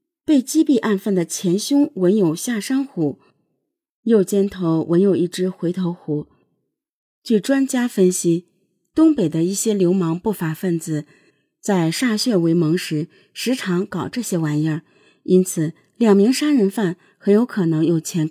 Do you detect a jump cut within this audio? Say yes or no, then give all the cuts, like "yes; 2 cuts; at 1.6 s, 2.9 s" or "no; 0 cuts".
no; 0 cuts